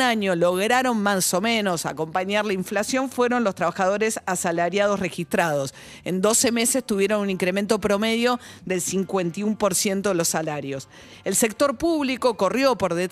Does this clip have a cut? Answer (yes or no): no